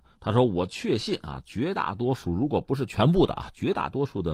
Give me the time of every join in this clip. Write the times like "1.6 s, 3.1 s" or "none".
none